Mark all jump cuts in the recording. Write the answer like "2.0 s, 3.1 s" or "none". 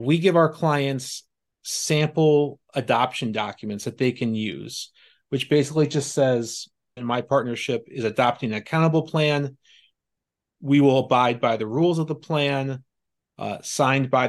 7.0 s